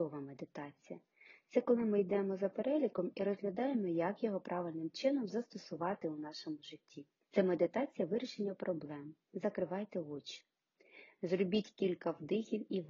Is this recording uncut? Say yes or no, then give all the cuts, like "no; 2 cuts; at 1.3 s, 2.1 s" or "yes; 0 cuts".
no; 2 cuts; at 7.2 s, 9.3 s